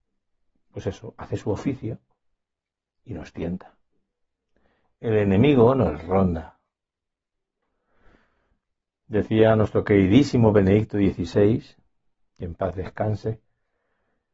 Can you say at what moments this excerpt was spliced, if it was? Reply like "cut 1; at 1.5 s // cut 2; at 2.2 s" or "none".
none